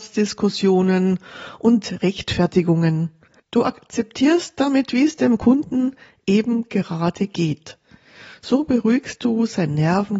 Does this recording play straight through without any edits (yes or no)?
no